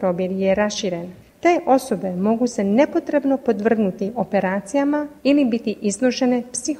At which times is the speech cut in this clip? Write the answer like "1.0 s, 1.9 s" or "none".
1.3 s, 5.2 s